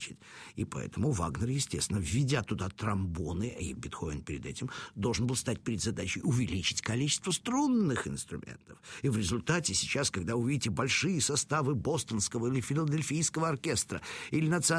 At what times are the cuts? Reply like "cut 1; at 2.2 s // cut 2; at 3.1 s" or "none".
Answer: none